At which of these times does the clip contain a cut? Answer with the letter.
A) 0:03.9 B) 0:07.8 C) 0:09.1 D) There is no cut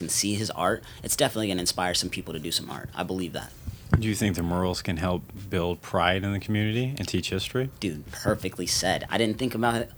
C